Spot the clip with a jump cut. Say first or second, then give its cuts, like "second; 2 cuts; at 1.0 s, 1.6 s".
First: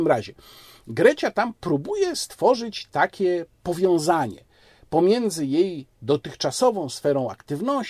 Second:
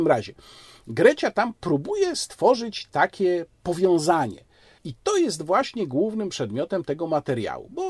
second; 1 cut; at 4.8 s